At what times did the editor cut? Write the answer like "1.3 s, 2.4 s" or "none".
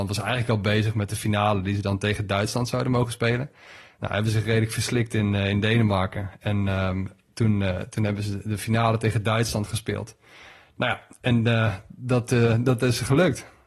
none